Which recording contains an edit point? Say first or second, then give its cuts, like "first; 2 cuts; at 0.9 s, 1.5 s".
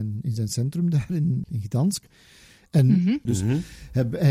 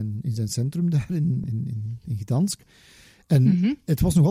first; 2 cuts; at 1.4 s, 3.3 s